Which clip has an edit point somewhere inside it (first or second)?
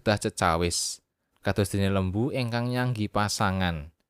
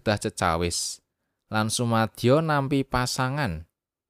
first